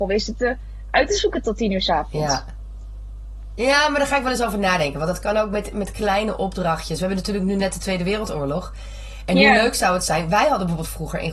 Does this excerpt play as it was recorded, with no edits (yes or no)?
yes